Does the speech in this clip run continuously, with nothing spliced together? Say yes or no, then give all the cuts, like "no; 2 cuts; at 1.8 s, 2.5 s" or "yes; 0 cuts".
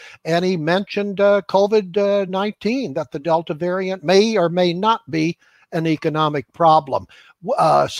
yes; 0 cuts